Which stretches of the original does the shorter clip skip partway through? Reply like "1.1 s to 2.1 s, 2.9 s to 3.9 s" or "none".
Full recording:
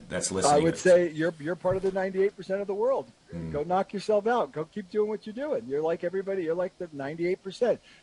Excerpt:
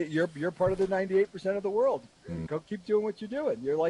3.5 s to 4.5 s